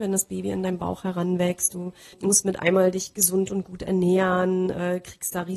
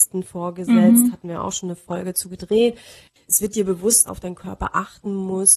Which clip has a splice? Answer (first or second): second